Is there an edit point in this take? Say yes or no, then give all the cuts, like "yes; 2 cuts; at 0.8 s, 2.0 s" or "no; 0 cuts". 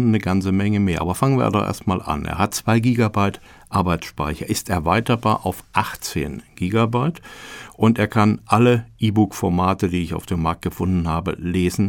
no; 0 cuts